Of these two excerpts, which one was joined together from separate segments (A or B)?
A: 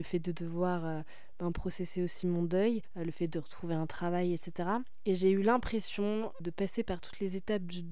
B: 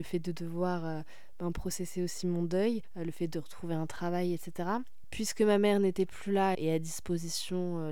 B